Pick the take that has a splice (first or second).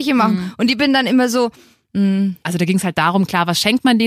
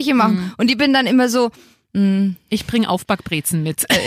first